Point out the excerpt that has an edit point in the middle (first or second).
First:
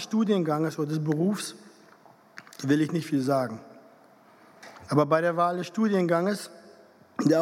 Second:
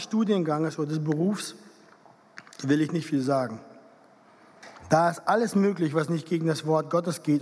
first